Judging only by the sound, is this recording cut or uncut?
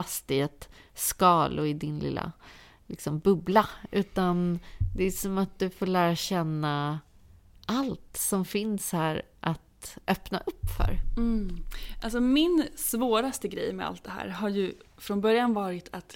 uncut